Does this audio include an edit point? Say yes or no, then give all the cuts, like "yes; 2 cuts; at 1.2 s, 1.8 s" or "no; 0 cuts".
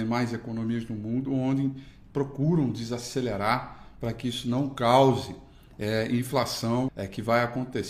yes; 1 cut; at 6.9 s